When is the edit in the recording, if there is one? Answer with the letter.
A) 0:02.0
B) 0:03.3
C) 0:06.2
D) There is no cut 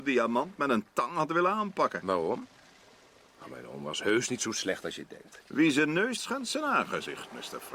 C